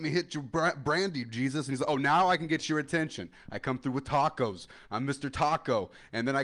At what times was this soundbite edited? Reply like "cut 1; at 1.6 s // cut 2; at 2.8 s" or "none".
none